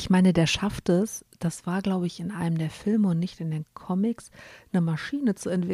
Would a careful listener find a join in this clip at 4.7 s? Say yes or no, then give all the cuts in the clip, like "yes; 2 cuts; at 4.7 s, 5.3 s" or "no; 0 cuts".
no; 0 cuts